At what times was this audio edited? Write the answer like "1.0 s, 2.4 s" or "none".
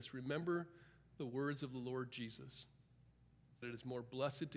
3.6 s